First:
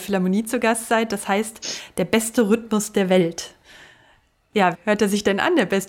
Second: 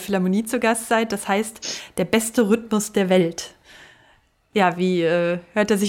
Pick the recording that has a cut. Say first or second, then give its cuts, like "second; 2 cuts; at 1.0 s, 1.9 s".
first; 1 cut; at 4.7 s